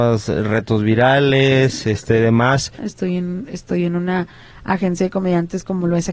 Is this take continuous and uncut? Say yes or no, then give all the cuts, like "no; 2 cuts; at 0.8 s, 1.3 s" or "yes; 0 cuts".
no; 1 cut; at 2.8 s